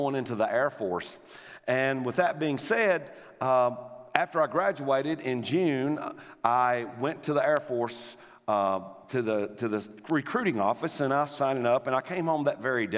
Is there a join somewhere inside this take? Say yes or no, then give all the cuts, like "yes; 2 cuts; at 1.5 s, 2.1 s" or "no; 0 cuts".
no; 0 cuts